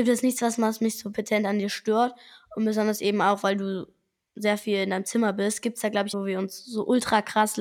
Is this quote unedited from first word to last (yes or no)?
no